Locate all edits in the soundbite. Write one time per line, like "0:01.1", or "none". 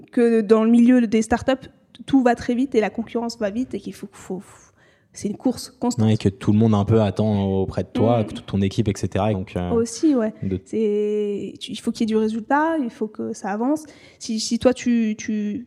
0:09.3